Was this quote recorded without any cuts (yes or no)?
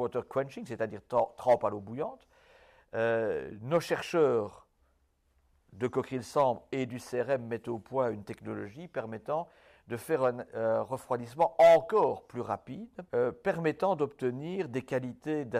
no